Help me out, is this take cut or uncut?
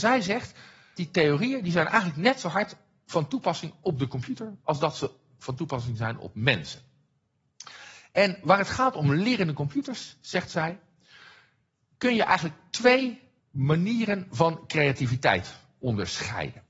cut